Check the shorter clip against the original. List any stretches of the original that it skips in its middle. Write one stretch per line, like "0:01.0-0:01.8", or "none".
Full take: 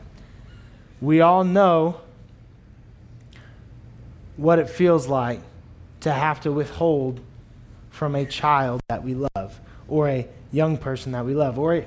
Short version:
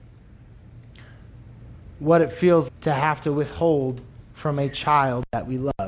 0:05.1-0:05.9
0:07.5-0:07.9